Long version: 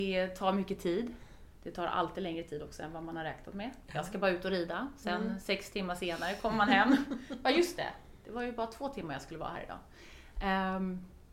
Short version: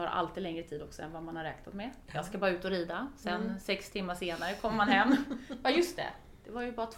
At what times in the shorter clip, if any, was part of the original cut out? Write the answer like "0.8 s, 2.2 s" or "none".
none